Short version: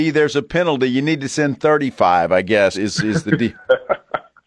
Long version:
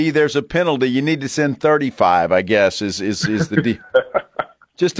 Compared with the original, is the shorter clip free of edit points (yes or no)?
no